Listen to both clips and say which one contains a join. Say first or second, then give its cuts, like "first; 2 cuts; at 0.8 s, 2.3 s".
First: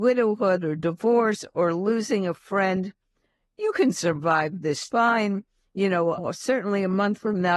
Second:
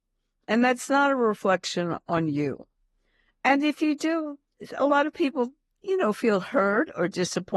first; 2 cuts; at 4.9 s, 6.2 s